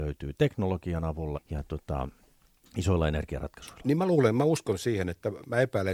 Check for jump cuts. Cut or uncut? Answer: cut